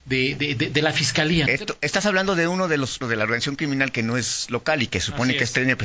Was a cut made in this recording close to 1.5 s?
yes; 2 cuts; at 1.5 s, 3.0 s

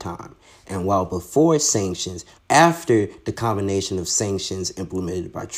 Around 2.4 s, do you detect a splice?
yes; 1 cut; at 2.4 s

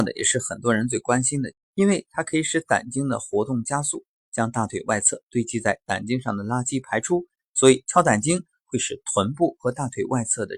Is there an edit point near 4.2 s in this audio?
no; 1 cut; at 1.5 s

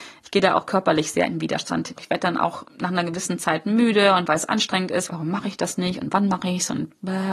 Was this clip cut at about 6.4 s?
no; 2 cuts; at 2.0 s, 5.1 s

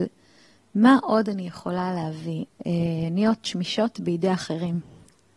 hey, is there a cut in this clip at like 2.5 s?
yes; 1 cut; at 2.5 s

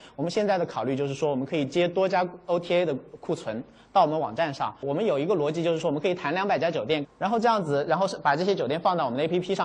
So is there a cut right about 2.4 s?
no; 2 cuts; at 4.8 s, 7.0 s

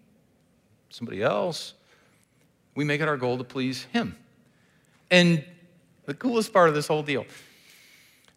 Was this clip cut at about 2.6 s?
no; 1 cut; at 6.0 s

